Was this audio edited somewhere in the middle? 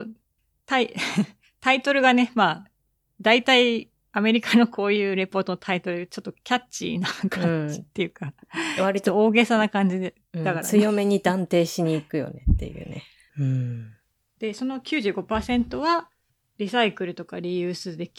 yes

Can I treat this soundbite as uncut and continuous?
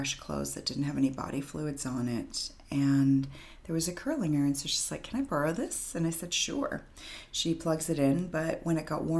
yes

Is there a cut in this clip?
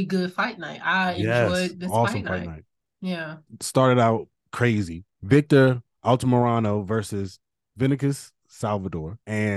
no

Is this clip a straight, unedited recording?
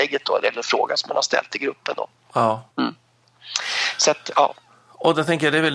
no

